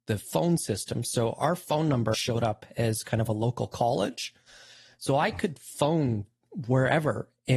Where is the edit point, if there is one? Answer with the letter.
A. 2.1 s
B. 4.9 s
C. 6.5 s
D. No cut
A